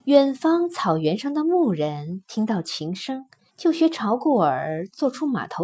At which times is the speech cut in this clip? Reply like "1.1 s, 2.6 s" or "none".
3.5 s